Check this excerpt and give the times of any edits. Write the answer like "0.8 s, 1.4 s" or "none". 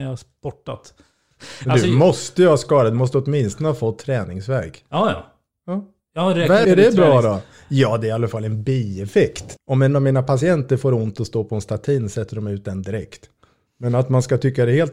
6.6 s, 9.6 s